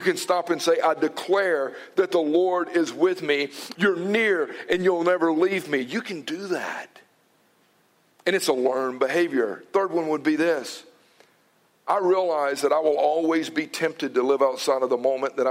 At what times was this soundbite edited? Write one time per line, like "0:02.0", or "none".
0:03.7